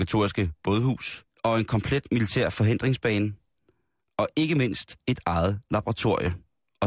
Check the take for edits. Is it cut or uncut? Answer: cut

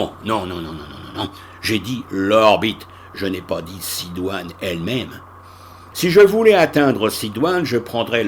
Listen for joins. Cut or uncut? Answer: cut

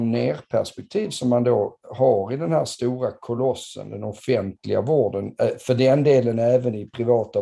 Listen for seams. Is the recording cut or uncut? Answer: uncut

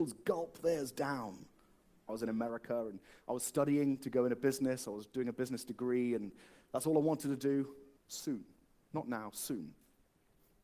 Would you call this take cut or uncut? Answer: cut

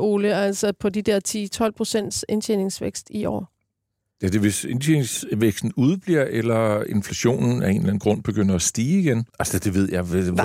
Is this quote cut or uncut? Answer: cut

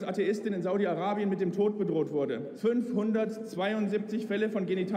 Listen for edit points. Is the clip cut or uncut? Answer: cut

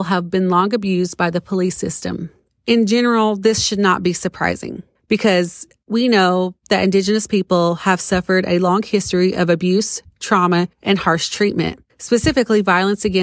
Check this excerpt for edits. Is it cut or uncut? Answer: uncut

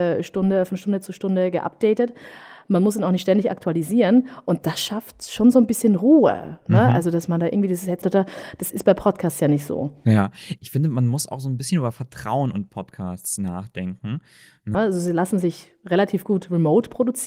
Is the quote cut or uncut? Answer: cut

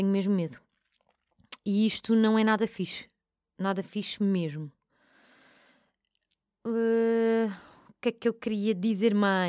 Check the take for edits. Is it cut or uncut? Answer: uncut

